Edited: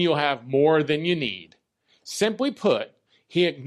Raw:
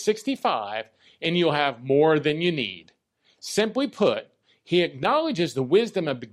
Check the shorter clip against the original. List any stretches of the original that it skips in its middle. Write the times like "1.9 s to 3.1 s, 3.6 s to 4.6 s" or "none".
none